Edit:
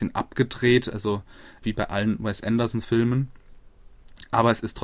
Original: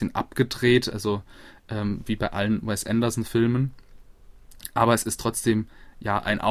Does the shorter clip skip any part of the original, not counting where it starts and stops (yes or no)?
yes